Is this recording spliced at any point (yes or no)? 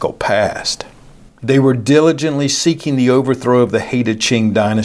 yes